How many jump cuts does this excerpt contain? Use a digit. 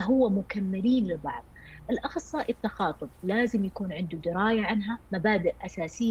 1